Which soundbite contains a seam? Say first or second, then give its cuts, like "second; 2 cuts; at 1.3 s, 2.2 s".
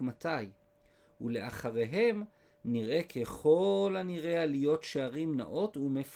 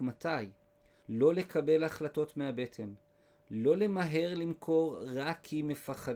second; 1 cut; at 1.0 s